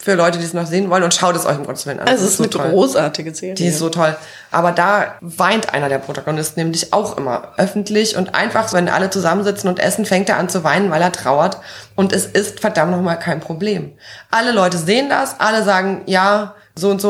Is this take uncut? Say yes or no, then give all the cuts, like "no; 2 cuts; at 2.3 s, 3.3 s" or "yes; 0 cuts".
no; 1 cut; at 8.7 s